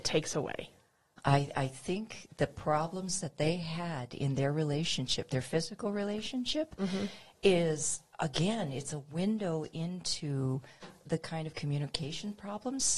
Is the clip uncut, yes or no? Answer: no